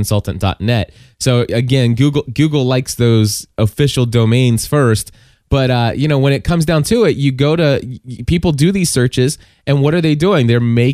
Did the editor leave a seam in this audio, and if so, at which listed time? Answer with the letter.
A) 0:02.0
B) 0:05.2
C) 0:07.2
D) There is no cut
D